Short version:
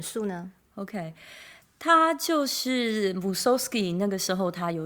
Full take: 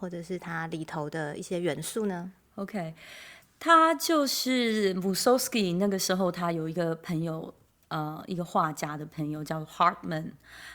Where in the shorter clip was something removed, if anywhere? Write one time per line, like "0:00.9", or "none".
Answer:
none